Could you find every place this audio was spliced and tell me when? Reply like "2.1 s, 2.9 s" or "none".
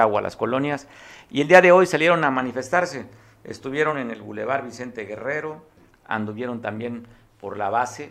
none